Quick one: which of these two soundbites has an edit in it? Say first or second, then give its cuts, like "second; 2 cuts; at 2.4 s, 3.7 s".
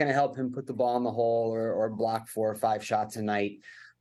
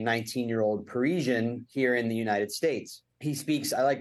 second; 1 cut; at 3.1 s